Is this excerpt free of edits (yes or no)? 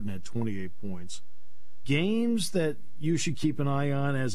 no